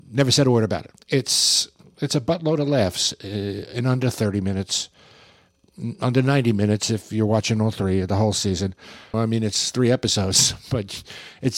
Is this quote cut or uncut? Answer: cut